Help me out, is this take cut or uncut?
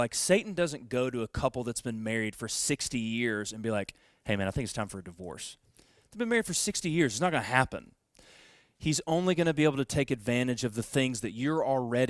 cut